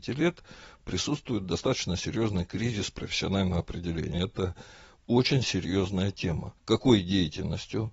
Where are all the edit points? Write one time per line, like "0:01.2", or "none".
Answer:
0:04.1
0:06.6